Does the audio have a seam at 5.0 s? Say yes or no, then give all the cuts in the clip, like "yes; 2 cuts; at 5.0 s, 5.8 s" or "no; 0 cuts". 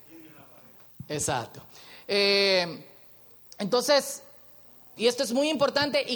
yes; 1 cut; at 5.0 s